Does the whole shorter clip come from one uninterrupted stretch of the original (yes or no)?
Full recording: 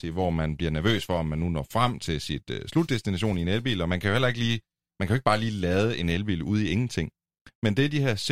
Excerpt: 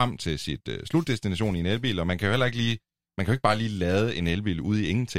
yes